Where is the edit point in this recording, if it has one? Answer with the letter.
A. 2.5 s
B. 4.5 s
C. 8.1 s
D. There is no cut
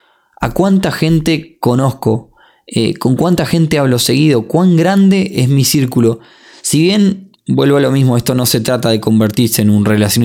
D